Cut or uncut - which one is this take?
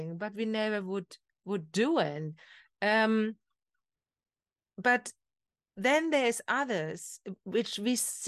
uncut